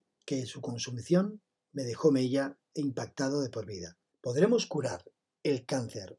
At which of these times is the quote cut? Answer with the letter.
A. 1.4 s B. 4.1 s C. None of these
B